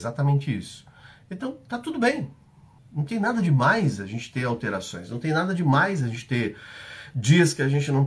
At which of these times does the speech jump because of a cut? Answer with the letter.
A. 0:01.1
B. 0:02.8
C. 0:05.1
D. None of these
B